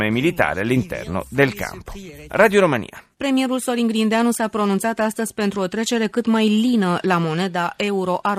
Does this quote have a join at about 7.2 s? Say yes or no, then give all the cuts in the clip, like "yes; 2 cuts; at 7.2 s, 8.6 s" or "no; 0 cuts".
no; 1 cut; at 3.1 s